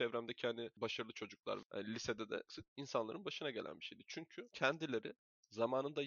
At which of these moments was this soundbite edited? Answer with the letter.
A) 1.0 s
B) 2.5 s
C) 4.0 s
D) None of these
B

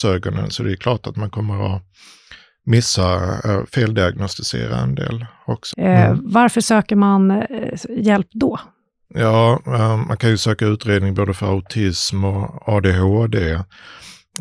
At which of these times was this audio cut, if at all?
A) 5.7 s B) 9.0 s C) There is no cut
A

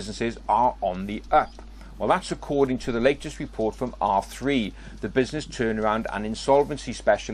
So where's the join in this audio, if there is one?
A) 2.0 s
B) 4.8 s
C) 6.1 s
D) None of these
D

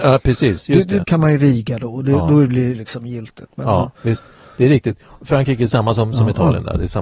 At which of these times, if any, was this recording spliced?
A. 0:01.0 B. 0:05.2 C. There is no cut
A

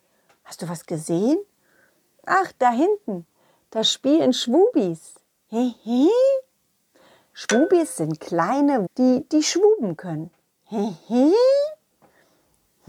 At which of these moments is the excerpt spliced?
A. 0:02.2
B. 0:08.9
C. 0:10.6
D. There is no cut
B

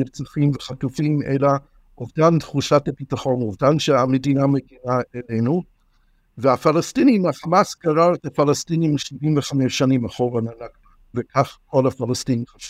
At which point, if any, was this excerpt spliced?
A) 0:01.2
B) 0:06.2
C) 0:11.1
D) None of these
C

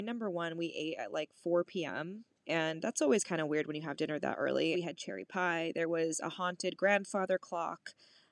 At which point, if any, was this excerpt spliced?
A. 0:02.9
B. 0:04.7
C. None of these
B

